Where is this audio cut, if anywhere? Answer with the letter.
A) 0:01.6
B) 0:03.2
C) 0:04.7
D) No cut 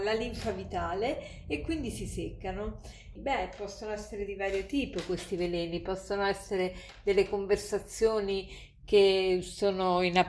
B